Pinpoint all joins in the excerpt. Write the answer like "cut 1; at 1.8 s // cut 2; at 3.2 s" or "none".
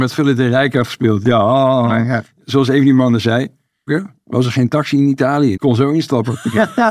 cut 1; at 3.9 s // cut 2; at 5.5 s